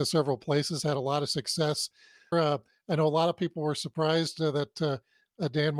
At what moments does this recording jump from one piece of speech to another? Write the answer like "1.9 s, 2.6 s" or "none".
2.3 s